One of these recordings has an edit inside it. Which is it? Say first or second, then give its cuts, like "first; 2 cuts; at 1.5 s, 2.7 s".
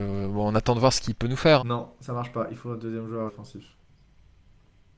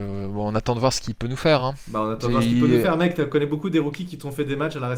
first; 2 cuts; at 1.6 s, 3.3 s